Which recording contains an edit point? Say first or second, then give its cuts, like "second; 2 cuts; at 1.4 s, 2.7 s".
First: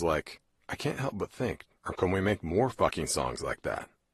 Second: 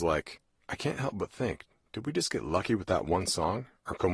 first; 1 cut; at 1.8 s